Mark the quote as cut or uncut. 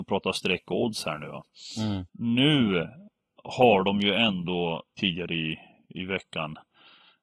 cut